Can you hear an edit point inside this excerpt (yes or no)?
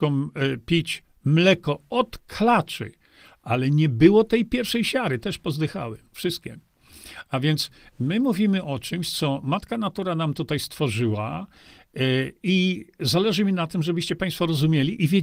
no